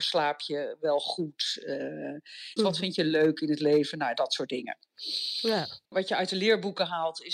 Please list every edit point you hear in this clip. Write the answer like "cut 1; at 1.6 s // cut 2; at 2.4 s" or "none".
cut 1; at 2.6 s // cut 2; at 5.9 s